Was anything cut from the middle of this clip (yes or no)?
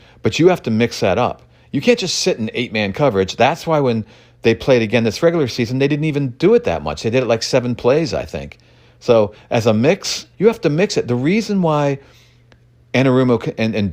yes